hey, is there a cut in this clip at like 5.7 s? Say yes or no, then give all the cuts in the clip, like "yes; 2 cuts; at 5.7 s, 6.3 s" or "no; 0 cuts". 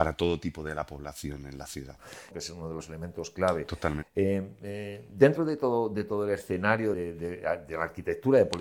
no; 3 cuts; at 2.3 s, 4.0 s, 6.9 s